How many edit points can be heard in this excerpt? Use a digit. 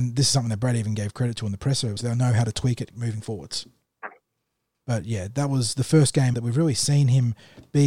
3